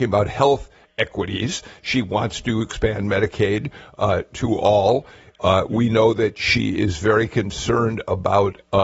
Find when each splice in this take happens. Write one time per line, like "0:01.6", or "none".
none